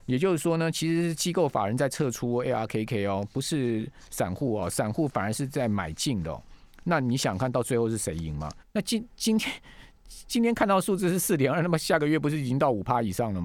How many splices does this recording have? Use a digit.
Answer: 1